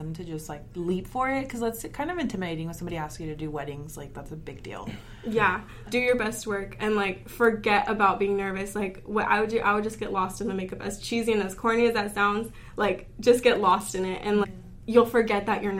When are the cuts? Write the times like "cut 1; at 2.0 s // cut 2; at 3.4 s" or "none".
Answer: cut 1; at 5.9 s // cut 2; at 14.4 s